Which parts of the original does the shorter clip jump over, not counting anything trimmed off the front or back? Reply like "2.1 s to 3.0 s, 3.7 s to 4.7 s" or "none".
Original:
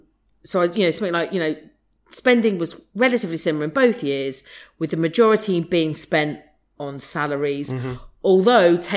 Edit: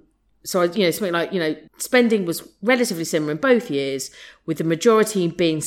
1.7 s to 2.0 s